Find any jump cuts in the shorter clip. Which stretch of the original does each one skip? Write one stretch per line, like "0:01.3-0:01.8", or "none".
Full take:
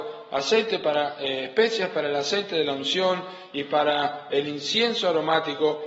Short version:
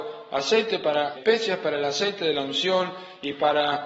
0:01.2-0:01.5